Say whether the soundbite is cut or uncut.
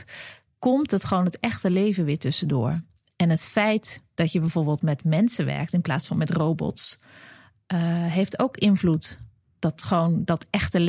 uncut